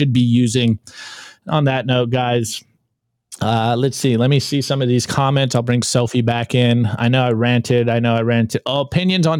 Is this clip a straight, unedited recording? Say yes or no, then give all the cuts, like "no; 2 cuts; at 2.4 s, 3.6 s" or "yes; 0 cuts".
yes; 0 cuts